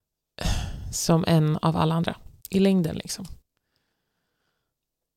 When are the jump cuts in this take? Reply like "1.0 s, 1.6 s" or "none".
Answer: 2.4 s